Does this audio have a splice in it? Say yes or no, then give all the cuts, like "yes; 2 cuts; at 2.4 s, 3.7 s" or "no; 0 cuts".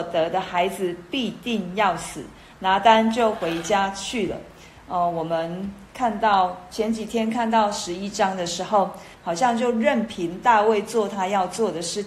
yes; 1 cut; at 9.1 s